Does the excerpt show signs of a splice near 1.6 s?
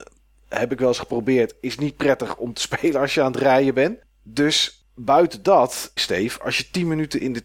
no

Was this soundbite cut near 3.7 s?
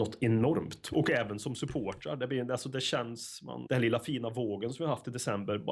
yes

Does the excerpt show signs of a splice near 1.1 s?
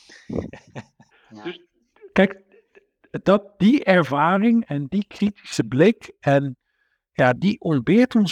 yes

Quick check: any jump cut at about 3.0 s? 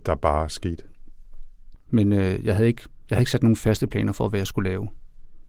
no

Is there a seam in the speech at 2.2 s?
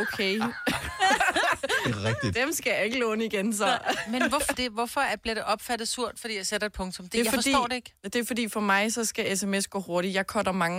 no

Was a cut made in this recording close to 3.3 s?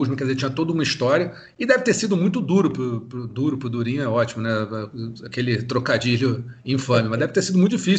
no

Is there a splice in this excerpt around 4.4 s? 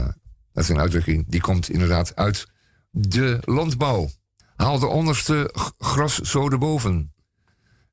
yes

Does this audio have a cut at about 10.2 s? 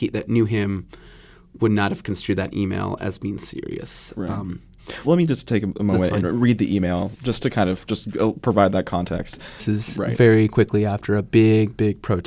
no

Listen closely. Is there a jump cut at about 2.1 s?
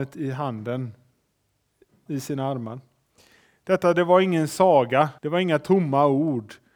yes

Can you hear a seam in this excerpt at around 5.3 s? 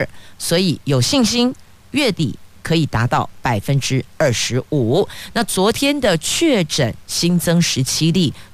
no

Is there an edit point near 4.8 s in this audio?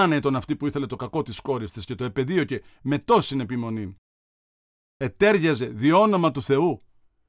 no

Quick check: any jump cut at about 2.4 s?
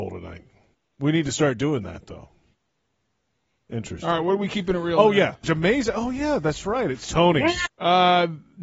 no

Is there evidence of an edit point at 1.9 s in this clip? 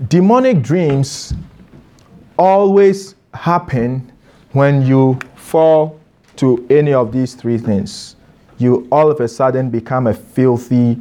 no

